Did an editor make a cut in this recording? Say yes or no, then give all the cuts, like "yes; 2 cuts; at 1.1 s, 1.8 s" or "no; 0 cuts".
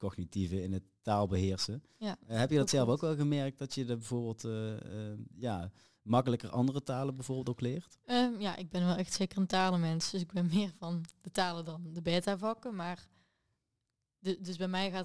no; 0 cuts